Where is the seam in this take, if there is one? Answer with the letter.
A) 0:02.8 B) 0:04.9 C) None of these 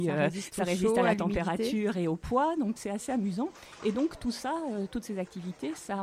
A